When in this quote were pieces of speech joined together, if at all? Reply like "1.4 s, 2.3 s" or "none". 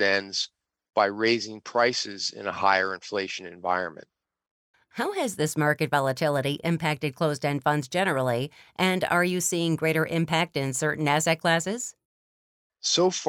4.7 s